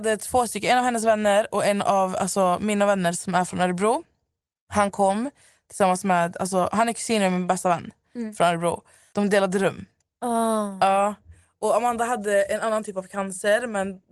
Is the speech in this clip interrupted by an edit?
yes; 1 cut; at 9.1 s

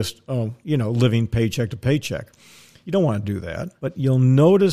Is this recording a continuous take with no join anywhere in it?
yes; 0 cuts

